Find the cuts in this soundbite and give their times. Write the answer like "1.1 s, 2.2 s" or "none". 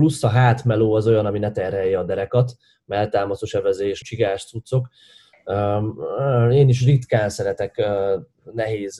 4.0 s